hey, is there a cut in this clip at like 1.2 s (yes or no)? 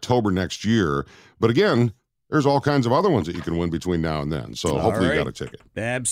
no